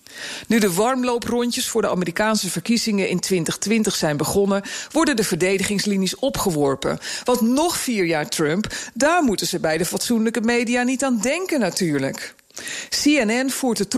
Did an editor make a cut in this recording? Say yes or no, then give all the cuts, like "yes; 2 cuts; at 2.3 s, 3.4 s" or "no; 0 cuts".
no; 0 cuts